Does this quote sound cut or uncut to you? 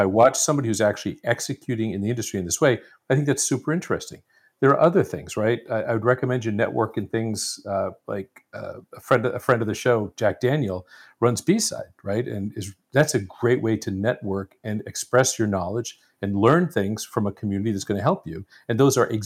uncut